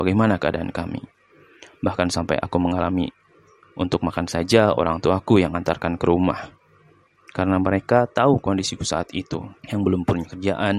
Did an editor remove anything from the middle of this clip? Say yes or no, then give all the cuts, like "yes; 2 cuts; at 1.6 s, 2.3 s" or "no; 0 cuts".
yes; 1 cut; at 9.6 s